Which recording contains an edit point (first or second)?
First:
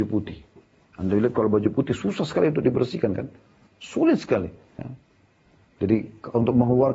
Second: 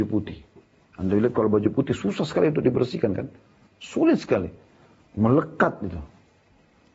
first